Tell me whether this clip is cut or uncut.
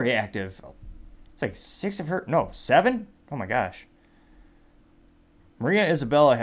cut